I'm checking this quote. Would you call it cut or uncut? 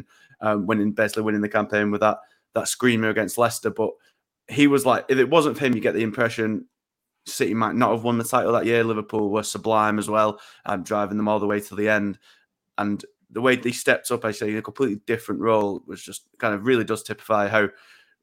uncut